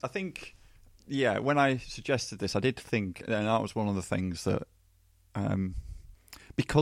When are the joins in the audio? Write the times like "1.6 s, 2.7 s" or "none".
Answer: none